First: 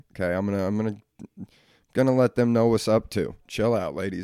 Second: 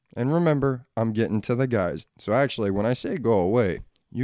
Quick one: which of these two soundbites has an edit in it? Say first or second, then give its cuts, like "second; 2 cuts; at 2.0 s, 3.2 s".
second; 1 cut; at 2.1 s